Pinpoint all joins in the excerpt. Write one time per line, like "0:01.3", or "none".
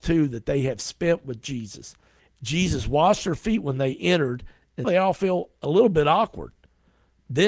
0:02.2
0:04.8